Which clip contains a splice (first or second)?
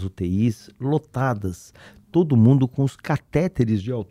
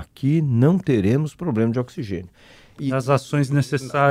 second